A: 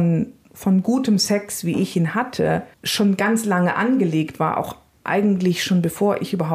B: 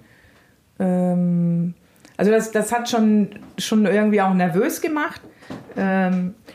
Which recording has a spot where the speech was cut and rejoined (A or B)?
A